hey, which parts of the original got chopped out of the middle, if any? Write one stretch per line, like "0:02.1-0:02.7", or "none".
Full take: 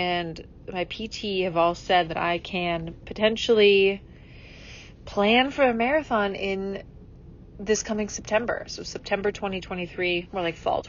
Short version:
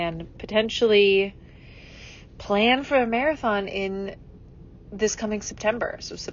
none